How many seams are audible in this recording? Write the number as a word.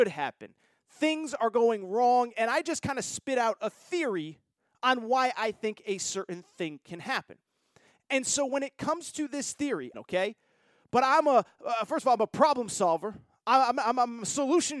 one